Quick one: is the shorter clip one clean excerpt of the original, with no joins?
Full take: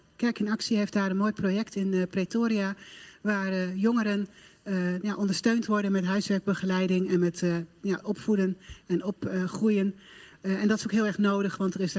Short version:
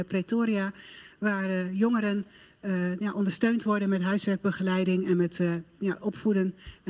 yes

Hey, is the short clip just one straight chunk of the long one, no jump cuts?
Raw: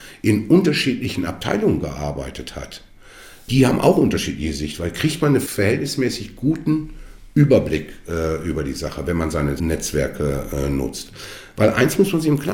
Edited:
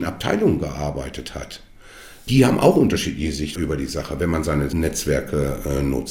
no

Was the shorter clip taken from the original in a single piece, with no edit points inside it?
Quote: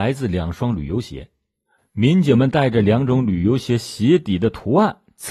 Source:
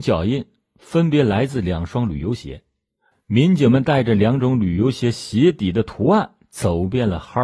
yes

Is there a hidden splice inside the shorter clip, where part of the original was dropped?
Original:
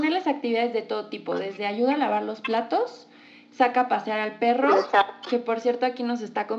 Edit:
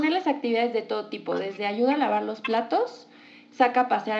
no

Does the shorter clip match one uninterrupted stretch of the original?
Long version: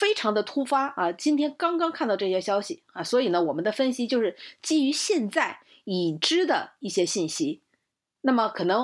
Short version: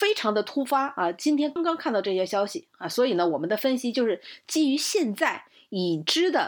no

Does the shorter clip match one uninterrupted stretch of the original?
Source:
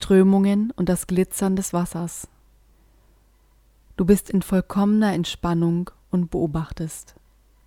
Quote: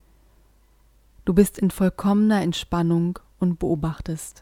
yes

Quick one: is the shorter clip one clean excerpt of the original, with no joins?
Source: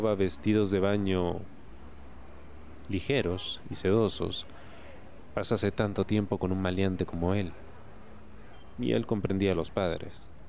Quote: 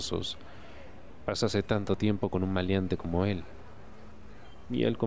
yes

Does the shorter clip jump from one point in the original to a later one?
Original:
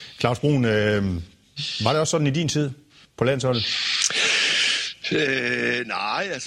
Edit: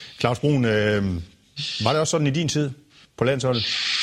no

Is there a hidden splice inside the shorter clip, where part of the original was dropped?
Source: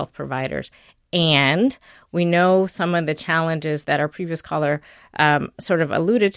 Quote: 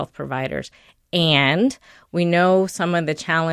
no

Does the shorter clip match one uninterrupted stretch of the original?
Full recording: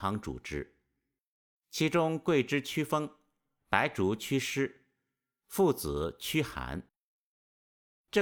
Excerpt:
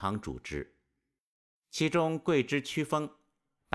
yes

